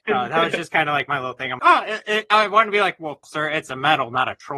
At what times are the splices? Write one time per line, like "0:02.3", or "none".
0:01.6
0:03.2